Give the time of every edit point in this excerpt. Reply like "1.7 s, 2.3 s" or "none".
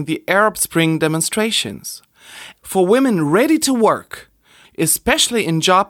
2.6 s, 4.6 s